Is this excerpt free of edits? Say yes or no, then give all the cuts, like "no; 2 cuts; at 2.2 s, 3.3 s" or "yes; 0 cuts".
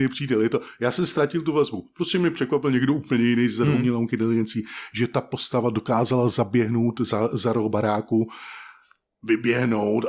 no; 1 cut; at 3.7 s